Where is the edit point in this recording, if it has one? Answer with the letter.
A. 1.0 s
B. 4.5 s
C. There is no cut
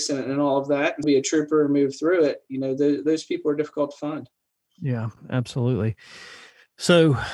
A